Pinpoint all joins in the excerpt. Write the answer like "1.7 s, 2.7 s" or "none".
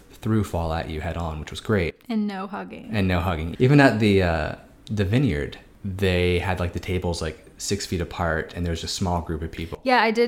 3.5 s, 8.8 s